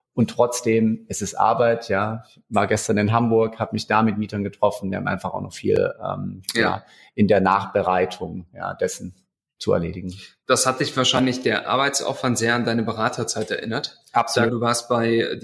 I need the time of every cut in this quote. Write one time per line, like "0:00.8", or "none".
0:14.5